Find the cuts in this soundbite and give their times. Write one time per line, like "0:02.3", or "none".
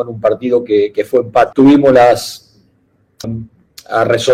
0:01.5
0:03.2